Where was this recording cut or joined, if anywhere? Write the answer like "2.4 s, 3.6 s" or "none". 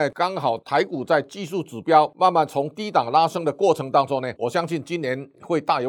4.4 s